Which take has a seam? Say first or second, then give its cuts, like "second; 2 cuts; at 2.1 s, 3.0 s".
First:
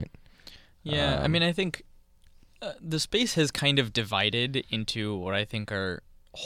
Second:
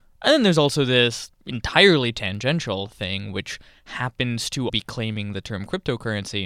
second; 2 cuts; at 1.4 s, 4.7 s